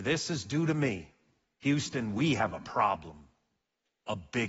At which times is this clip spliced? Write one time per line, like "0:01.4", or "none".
none